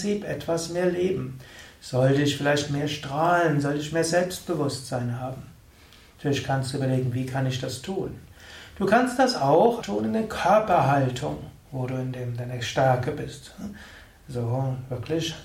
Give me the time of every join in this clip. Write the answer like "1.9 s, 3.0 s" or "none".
9.8 s